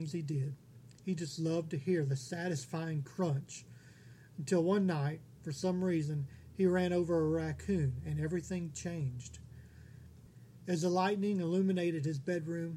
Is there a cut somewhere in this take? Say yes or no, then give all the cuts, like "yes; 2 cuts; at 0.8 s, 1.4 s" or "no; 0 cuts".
yes; 1 cut; at 10.6 s